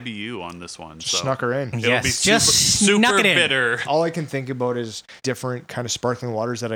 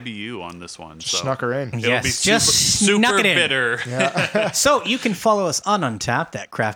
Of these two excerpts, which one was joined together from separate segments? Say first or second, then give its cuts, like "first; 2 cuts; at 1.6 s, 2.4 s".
first; 2 cuts; at 3.8 s, 5.2 s